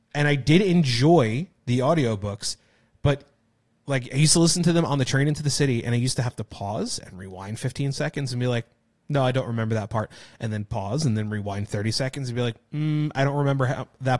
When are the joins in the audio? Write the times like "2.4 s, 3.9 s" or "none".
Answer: none